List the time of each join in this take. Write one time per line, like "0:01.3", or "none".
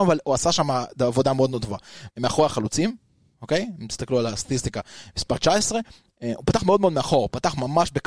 0:02.1